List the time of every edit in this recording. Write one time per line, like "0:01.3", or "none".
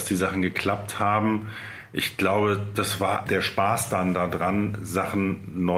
0:03.3